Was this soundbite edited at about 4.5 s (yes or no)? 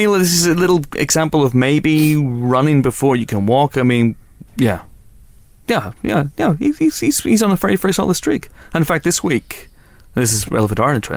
yes